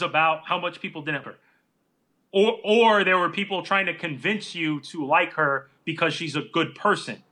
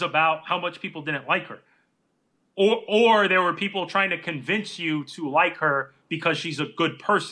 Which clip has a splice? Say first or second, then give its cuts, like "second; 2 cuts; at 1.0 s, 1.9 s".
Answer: first; 1 cut; at 1.2 s